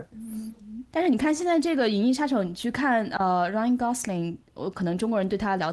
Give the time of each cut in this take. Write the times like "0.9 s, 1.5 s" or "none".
none